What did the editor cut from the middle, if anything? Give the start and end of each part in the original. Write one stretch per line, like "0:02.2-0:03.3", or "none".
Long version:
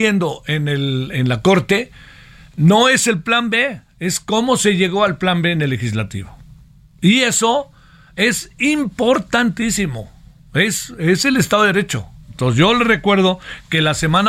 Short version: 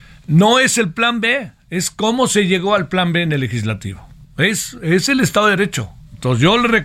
0:06.5-0:10.4